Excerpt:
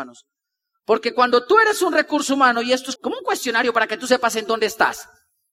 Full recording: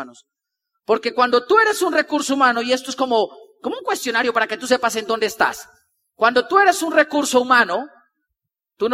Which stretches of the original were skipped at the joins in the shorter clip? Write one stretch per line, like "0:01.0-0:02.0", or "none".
0:03.0-0:03.6